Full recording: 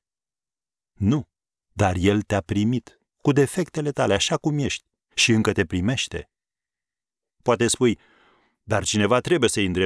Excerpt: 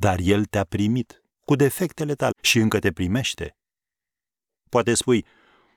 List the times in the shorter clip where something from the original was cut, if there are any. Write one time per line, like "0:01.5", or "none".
0:02.3